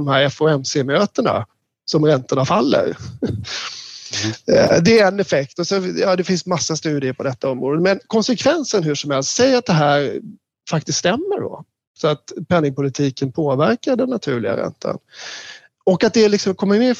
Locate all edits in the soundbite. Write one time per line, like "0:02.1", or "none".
none